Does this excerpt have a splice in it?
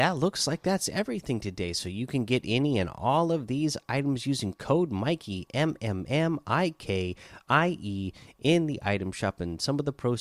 no; 0 cuts

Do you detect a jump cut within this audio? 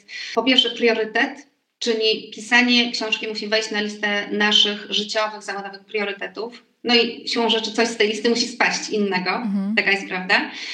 no; 0 cuts

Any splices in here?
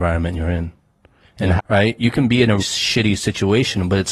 yes; 2 cuts; at 1.6 s, 2.6 s

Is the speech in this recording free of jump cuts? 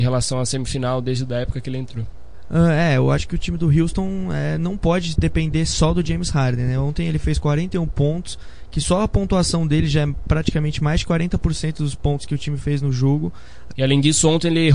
no; 1 cut; at 13.7 s

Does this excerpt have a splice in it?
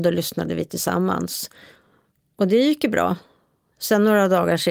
no; 0 cuts

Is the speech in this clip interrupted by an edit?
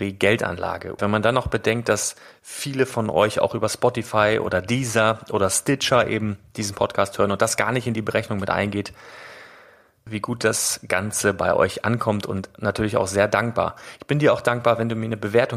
yes; 2 cuts; at 1.0 s, 10.1 s

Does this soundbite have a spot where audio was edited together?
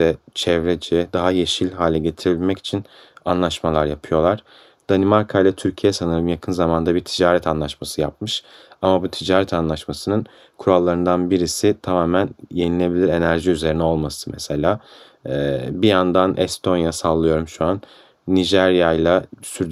no; 0 cuts

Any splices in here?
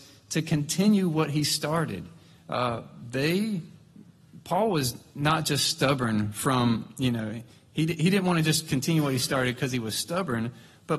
no; 0 cuts

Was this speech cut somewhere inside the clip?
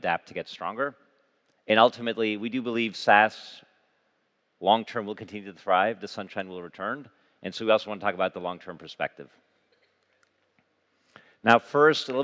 no; 0 cuts

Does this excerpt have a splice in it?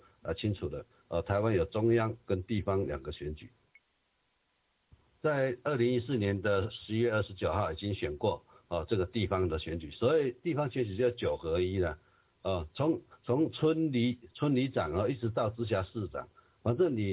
no; 0 cuts

